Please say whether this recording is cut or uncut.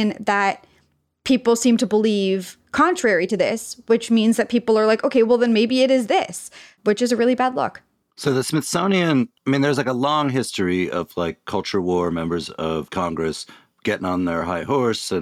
uncut